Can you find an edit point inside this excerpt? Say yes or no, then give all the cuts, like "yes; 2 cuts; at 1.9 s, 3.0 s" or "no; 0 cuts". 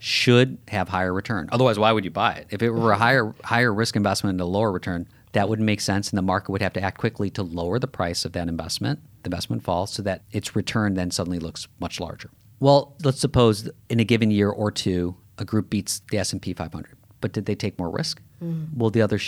no; 0 cuts